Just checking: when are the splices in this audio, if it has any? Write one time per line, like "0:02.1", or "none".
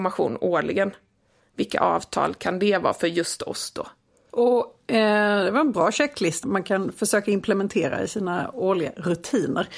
0:04.3
0:06.4

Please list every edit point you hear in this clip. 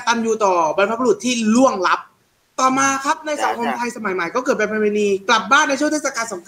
none

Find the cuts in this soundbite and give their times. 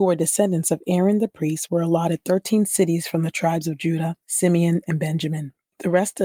none

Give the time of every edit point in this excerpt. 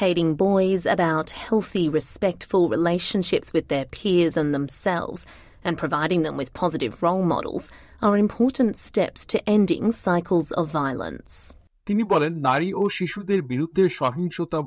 none

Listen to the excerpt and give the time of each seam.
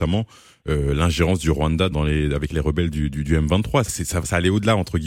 0:01.9
0:03.8

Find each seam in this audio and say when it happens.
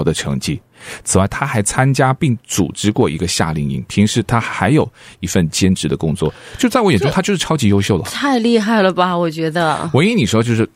none

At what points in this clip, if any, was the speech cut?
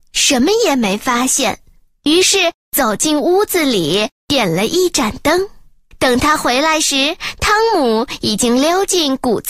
none

